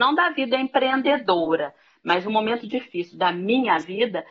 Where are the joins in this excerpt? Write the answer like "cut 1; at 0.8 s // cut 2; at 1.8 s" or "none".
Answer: cut 1; at 2.6 s